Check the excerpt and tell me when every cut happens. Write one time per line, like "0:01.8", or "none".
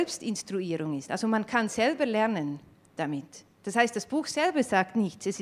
none